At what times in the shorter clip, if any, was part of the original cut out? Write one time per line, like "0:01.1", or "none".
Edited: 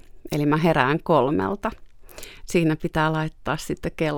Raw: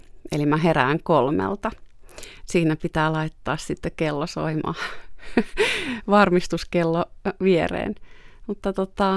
none